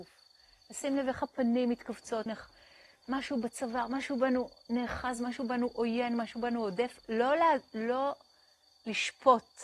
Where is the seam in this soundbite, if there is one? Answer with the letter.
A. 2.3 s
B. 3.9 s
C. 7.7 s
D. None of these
A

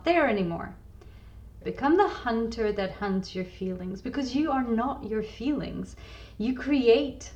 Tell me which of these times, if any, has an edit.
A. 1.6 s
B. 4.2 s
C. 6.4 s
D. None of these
A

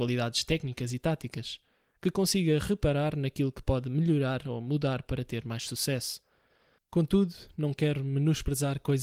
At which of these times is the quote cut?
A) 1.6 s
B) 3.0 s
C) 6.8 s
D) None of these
C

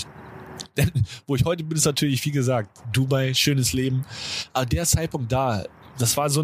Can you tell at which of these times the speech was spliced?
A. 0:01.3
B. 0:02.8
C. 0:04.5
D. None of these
B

